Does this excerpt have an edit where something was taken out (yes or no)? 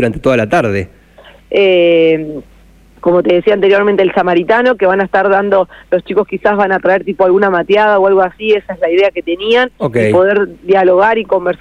yes